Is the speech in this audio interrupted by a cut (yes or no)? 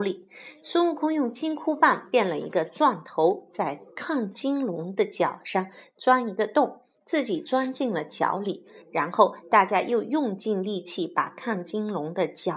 no